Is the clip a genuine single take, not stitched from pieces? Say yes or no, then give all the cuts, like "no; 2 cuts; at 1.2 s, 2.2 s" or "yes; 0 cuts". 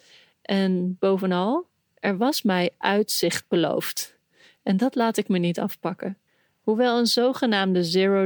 yes; 0 cuts